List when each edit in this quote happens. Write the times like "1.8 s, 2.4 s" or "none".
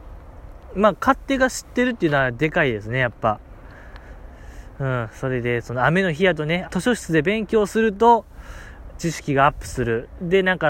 6.6 s, 9.0 s